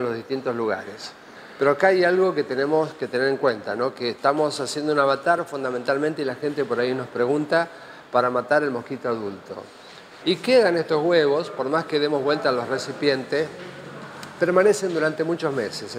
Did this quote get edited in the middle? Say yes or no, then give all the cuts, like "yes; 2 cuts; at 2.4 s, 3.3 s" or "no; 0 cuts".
yes; 1 cut; at 10.2 s